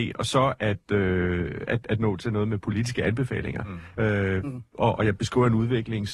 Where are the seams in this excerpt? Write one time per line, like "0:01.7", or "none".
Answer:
0:04.0